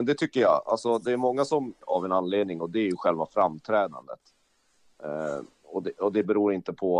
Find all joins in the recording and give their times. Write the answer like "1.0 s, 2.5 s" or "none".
1.8 s

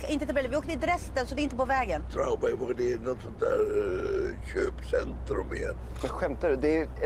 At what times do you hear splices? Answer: none

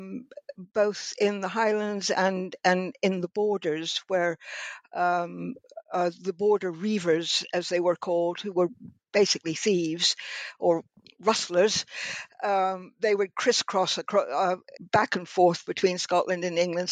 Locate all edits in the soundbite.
14.8 s

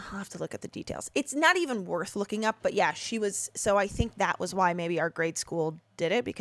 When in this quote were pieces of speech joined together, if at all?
none

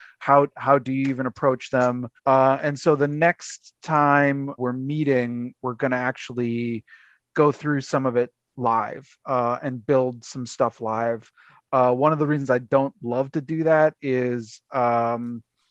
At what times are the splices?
2.2 s, 4.6 s

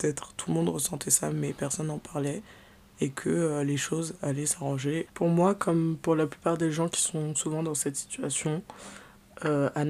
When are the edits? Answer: 5.1 s

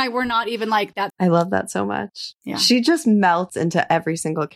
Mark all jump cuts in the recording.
1.1 s

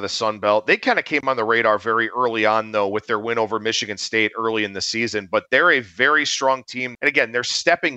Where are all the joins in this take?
6.9 s

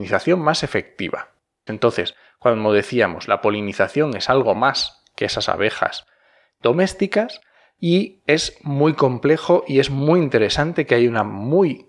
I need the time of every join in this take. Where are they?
1.7 s

